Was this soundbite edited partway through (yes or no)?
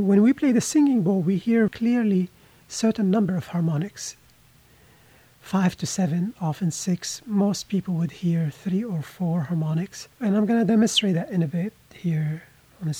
yes